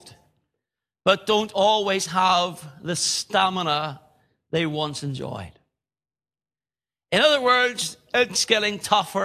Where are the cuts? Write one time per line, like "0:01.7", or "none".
none